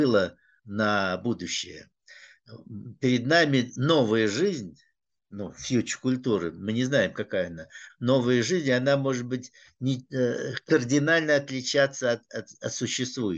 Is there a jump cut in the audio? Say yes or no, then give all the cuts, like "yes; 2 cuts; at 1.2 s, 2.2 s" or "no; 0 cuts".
no; 0 cuts